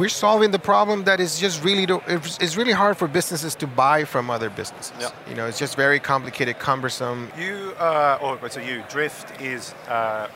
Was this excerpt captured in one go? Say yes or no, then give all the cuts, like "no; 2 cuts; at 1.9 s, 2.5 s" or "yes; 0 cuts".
no; 1 cut; at 7.3 s